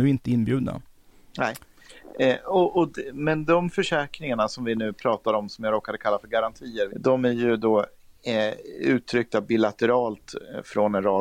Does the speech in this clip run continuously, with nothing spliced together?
no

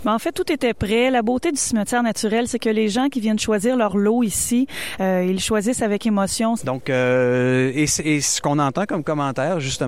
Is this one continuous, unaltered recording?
no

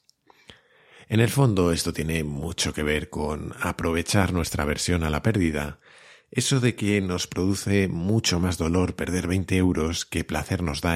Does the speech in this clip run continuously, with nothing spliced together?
yes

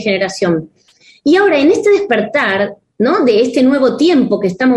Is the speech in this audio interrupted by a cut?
no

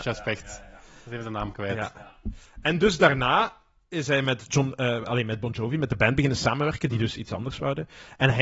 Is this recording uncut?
yes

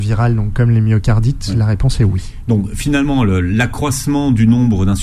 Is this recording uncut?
yes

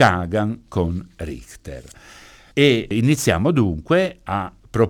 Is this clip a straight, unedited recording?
no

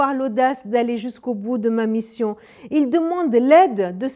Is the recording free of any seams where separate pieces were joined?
yes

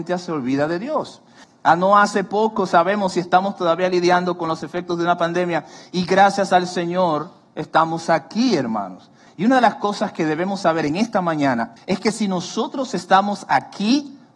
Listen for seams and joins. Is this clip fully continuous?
no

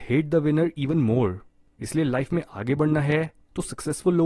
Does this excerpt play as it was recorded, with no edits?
yes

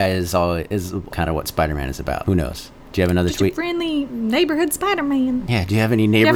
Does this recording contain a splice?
yes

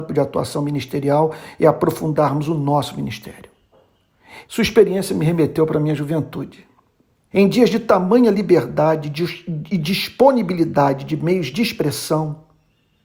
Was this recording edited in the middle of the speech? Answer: yes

